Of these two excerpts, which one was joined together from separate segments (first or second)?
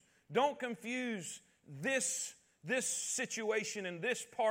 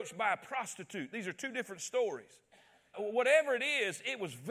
second